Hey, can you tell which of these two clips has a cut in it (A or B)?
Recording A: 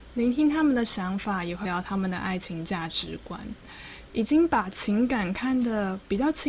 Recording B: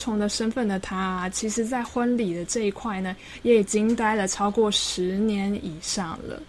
A